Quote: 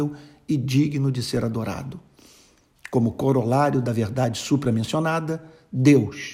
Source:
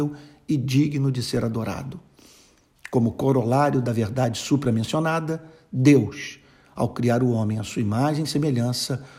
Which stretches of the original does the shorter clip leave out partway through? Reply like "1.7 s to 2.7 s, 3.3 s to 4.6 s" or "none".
none